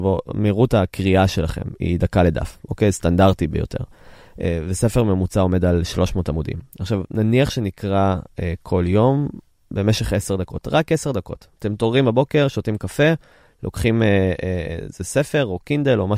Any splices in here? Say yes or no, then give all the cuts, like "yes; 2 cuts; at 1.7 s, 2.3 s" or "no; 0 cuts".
no; 0 cuts